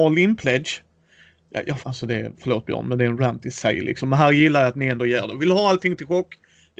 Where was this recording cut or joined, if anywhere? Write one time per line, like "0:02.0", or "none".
0:01.8